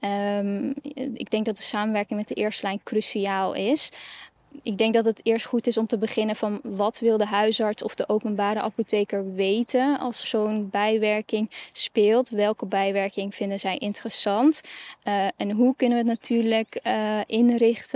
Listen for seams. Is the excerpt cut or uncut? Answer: cut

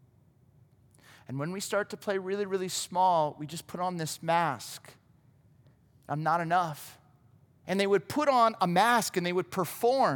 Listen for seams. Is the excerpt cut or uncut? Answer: cut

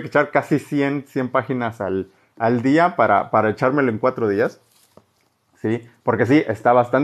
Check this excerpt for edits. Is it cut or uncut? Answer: uncut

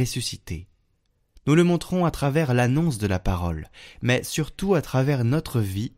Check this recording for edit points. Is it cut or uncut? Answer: uncut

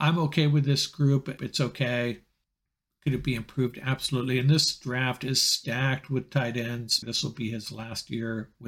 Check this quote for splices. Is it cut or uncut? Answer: cut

